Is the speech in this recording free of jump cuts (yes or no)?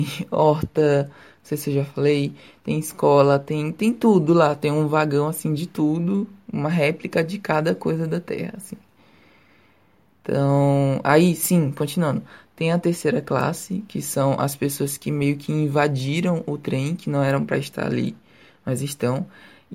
yes